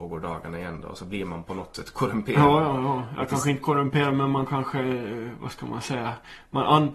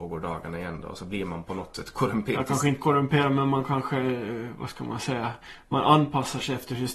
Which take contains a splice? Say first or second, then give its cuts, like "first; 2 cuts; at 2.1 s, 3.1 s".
second; 1 cut; at 2.3 s